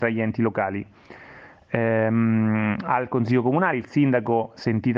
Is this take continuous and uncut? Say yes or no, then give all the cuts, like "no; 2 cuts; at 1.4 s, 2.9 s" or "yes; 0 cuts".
yes; 0 cuts